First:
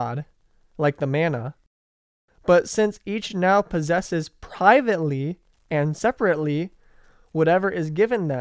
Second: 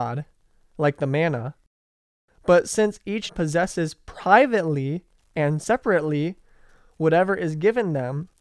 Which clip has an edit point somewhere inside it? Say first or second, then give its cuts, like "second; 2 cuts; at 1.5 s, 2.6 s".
second; 1 cut; at 3.3 s